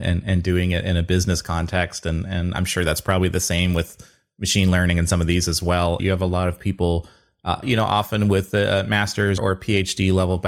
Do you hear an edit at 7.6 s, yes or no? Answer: yes